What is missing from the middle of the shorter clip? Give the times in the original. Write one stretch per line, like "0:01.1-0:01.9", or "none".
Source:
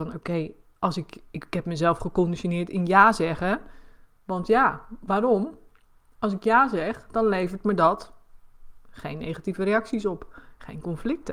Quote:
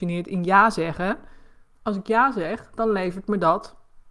0:04.1-0:06.1